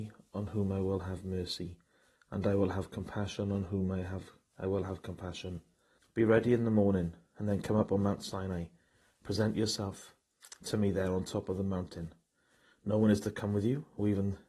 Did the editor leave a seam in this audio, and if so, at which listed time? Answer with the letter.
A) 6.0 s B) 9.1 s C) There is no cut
A